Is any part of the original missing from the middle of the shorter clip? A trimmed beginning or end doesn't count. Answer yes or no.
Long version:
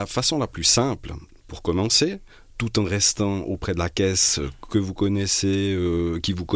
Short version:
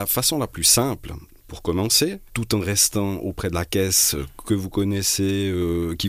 yes